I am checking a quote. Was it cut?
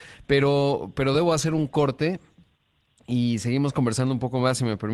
no; 0 cuts

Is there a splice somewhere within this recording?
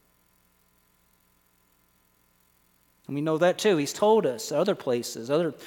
no; 0 cuts

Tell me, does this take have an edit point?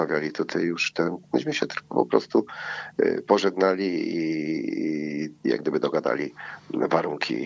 no; 0 cuts

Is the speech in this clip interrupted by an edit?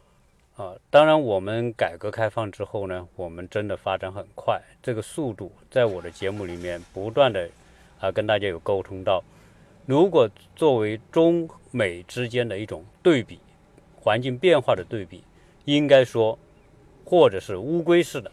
yes; 1 cut; at 16.9 s

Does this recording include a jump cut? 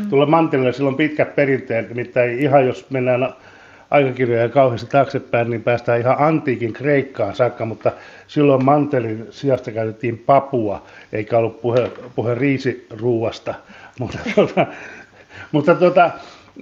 no; 0 cuts

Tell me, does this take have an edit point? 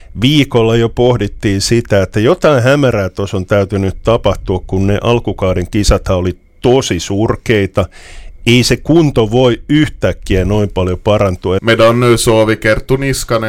yes; 1 cut; at 11.6 s

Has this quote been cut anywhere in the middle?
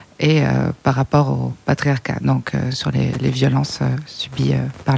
no; 0 cuts

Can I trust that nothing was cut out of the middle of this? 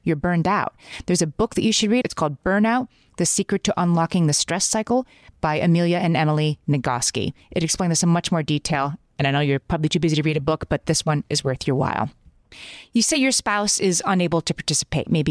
no; 1 cut; at 2.0 s

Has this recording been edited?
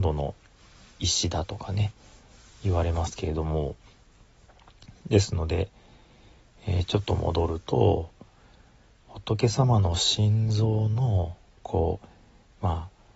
no; 0 cuts

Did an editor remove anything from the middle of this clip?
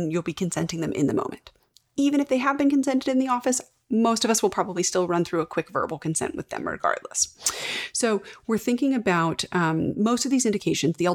no; 0 cuts

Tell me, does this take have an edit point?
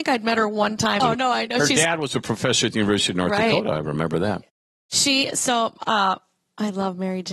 yes; 1 cut; at 1.0 s

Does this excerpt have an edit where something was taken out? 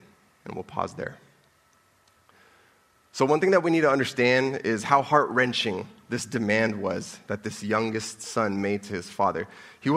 no; 0 cuts

